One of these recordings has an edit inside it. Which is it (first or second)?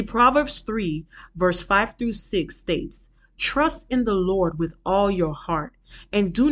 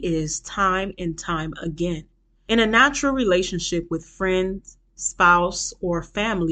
second